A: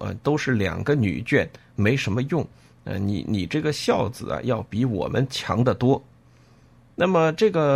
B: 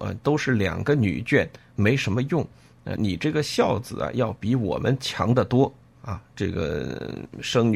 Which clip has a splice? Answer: B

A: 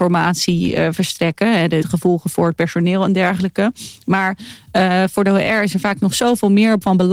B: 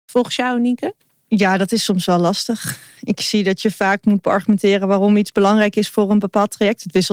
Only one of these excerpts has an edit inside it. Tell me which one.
A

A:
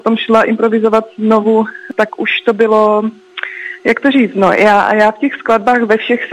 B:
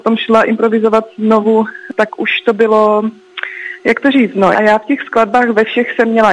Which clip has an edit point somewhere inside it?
B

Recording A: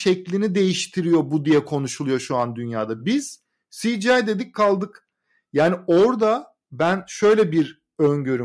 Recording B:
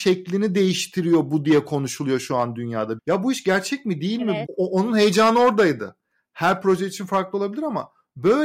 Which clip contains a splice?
B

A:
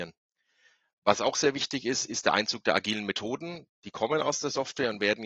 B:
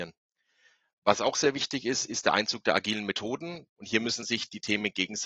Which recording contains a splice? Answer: B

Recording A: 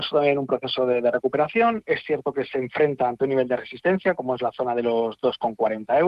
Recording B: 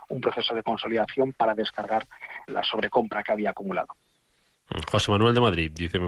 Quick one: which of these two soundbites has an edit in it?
B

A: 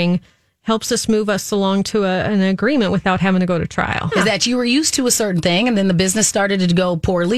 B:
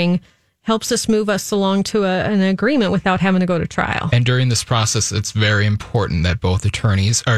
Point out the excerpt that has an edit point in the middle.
A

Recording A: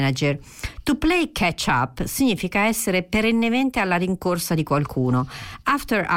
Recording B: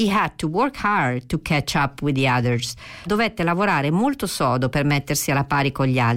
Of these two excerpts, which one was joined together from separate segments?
B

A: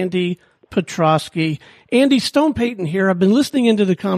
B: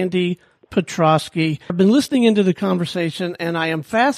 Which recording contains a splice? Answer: B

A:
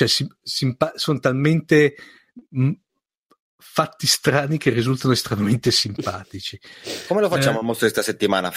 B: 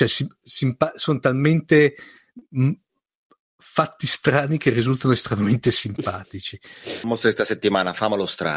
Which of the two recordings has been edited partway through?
B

